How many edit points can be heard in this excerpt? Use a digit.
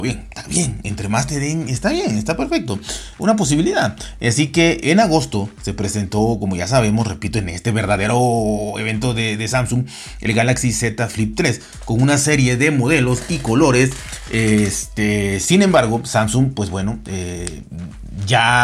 1